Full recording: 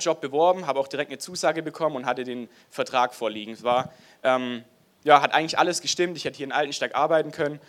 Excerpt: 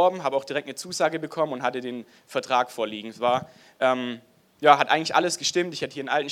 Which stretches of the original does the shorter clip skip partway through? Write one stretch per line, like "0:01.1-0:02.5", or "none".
none